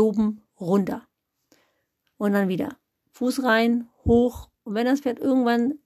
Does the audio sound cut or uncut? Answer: uncut